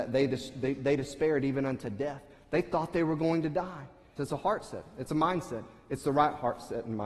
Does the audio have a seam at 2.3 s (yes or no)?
no